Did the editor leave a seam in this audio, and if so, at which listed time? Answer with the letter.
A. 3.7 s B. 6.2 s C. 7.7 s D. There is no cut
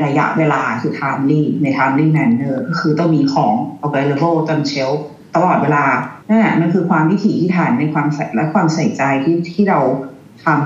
B